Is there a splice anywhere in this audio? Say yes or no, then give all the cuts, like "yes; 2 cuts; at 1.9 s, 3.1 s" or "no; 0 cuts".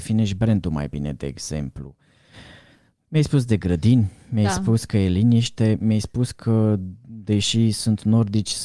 no; 0 cuts